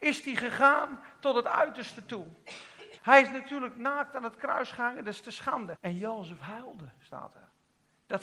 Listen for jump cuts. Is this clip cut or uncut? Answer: cut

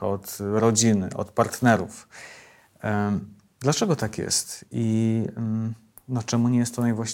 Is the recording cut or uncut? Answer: uncut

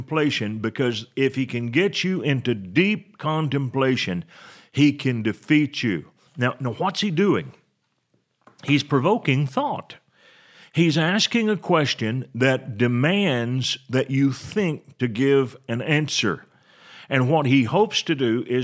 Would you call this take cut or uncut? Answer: cut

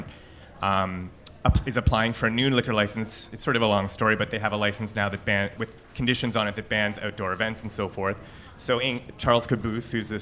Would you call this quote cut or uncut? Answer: cut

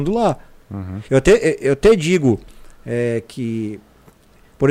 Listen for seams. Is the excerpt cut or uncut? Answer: cut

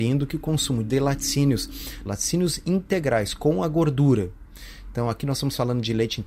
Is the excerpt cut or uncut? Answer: cut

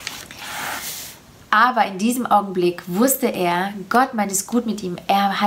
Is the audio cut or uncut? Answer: cut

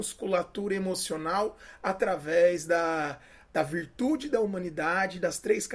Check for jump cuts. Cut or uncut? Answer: uncut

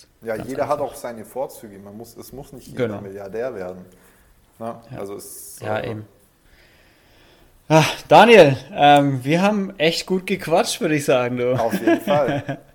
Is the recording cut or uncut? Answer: uncut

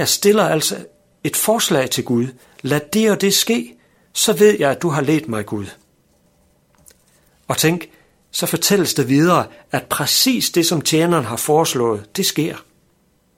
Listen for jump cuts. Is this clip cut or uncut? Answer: uncut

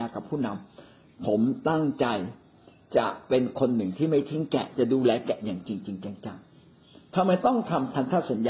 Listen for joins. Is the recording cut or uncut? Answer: uncut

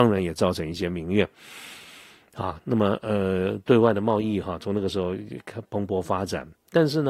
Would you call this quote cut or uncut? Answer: uncut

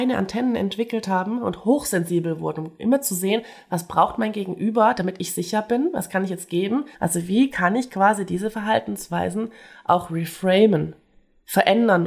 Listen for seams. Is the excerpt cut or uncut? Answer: cut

